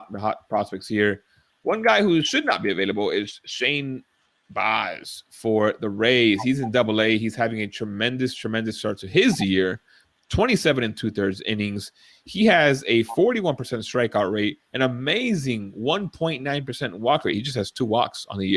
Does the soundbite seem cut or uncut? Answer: uncut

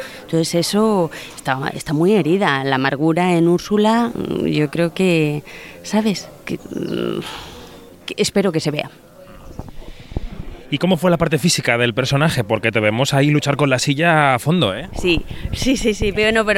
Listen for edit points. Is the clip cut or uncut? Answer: cut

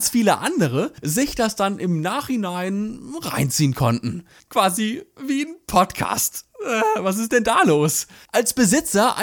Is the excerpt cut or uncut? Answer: uncut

